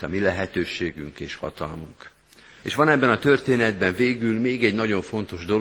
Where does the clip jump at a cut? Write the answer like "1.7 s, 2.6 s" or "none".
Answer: 2.6 s